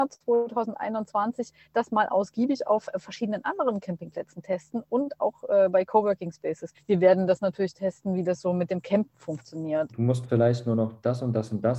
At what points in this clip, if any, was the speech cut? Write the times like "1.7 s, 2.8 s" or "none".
6.7 s, 9.9 s